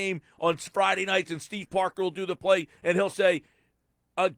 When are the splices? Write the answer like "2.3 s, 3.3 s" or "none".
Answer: none